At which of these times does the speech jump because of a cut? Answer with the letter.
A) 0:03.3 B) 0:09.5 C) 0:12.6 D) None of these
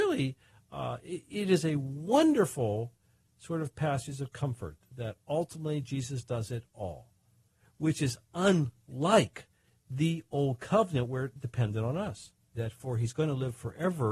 C